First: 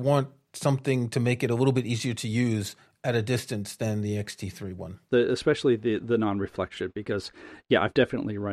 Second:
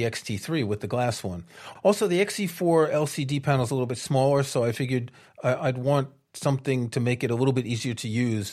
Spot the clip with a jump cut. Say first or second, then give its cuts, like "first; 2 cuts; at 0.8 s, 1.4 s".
first; 1 cut; at 5.1 s